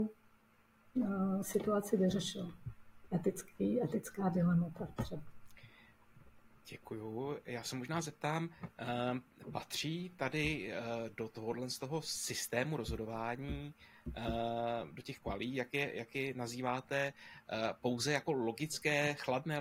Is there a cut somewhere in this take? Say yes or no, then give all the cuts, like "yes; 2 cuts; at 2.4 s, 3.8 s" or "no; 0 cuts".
no; 0 cuts